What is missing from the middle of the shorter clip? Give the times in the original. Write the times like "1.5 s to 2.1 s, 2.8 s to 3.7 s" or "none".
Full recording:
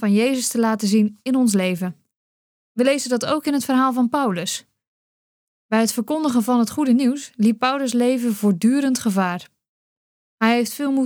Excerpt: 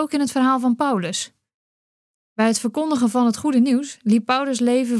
none